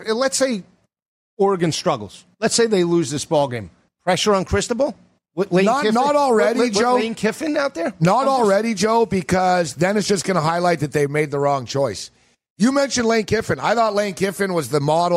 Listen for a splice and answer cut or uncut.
uncut